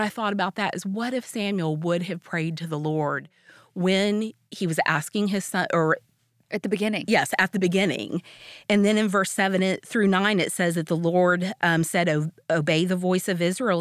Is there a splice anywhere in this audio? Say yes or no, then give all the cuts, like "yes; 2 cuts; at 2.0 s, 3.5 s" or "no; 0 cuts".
no; 0 cuts